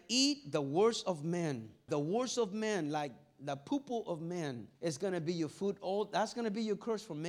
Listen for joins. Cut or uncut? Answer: cut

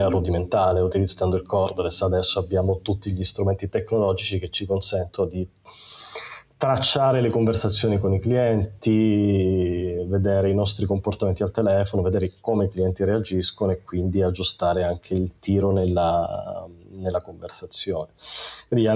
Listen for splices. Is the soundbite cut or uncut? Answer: uncut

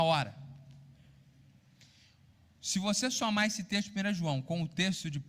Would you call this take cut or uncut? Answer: uncut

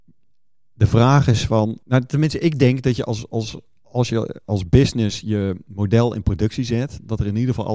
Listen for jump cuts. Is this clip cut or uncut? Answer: cut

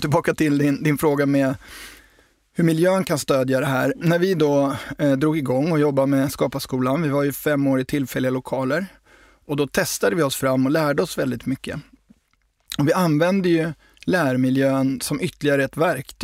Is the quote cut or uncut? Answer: uncut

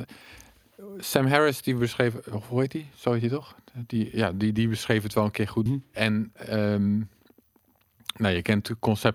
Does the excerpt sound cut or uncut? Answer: cut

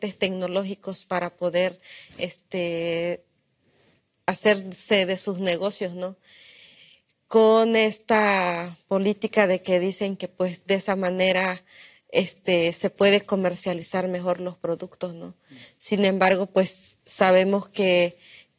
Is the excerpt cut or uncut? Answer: uncut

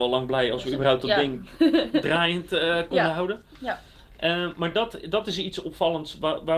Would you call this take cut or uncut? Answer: uncut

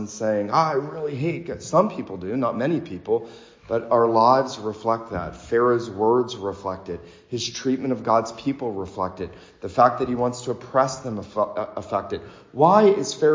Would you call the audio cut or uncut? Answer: uncut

